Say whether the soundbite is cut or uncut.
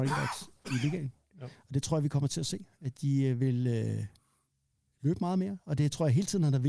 uncut